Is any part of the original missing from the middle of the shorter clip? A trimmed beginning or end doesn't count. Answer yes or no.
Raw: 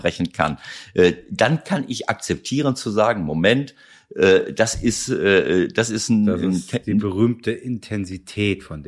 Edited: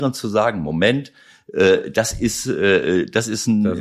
no